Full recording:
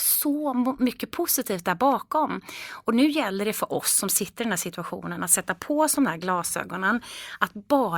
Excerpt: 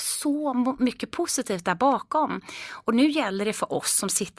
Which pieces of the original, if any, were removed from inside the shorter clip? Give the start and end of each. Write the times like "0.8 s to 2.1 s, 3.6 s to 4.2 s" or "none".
none

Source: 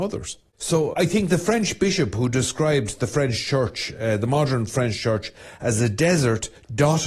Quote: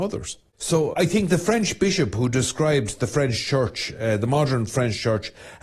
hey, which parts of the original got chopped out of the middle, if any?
none

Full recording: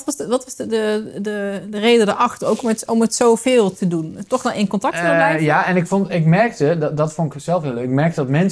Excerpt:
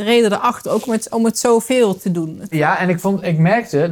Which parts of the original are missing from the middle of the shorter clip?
4.3 s to 5.4 s

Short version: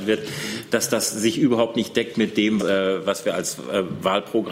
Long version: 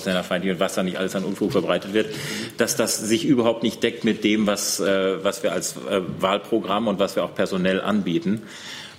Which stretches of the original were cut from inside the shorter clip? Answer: 4.5 s to 4.8 s

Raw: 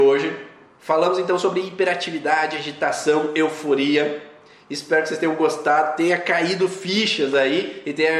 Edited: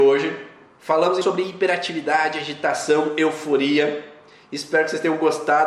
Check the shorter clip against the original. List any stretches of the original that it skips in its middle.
1.2 s to 1.4 s

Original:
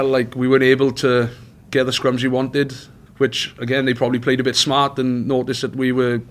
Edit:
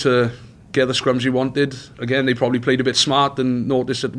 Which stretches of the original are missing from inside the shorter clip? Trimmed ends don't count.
2.9 s to 3.5 s

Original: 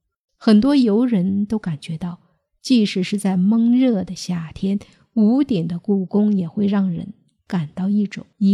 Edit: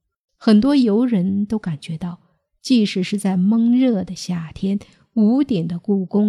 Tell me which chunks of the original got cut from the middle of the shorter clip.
none

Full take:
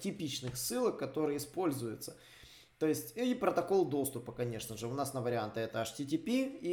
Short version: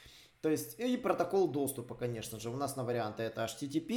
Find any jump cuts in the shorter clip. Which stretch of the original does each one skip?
none

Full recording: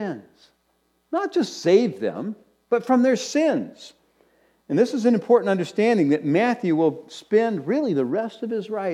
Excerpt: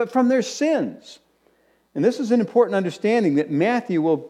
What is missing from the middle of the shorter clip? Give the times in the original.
none

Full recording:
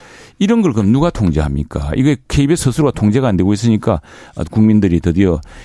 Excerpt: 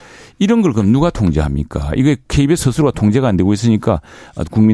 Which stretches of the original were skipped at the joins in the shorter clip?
none

